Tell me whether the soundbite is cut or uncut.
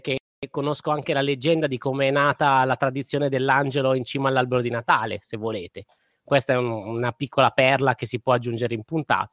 uncut